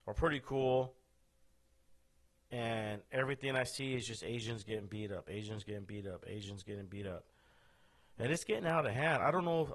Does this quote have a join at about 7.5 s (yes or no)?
no